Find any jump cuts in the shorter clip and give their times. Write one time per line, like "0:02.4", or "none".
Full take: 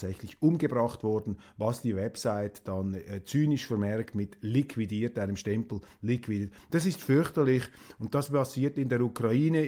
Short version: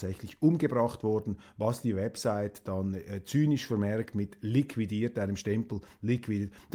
none